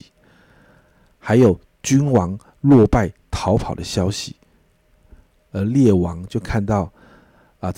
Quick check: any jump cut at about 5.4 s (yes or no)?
yes